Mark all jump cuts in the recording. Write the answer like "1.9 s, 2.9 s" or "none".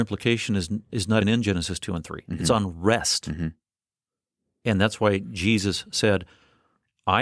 1.2 s